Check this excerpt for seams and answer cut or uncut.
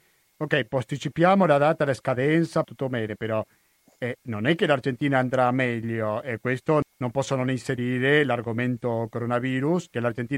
uncut